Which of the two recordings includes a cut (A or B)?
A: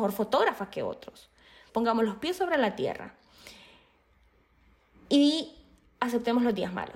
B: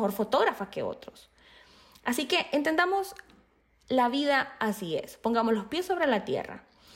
A